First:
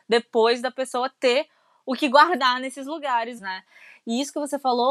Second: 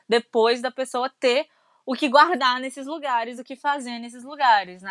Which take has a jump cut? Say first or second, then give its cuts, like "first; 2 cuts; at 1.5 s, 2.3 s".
first; 1 cut; at 3.4 s